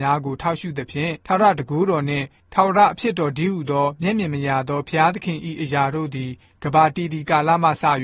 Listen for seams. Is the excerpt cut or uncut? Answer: cut